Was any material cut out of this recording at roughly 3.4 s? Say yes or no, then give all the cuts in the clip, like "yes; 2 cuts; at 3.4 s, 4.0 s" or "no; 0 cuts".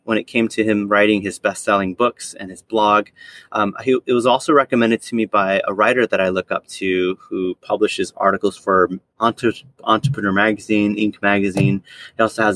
no; 0 cuts